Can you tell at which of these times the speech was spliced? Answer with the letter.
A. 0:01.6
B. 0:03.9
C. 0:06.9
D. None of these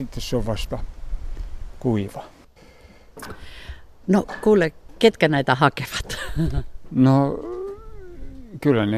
D